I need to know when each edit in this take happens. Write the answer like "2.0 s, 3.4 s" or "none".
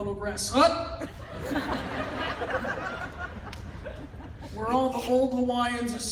none